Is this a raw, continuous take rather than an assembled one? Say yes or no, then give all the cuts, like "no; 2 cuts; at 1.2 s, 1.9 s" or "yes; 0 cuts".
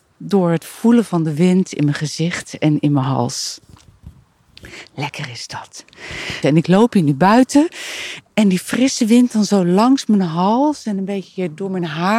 no; 2 cuts; at 6.4 s, 8.2 s